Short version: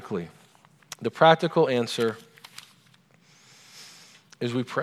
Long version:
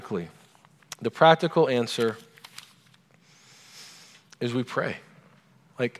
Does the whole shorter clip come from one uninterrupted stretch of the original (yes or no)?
yes